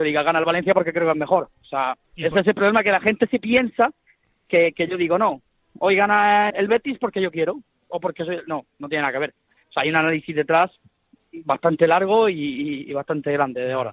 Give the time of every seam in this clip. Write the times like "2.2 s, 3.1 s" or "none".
2.0 s, 6.5 s